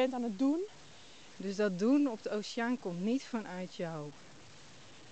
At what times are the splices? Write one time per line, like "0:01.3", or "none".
0:01.3